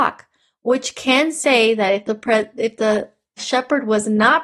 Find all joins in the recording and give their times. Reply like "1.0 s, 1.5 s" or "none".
3.4 s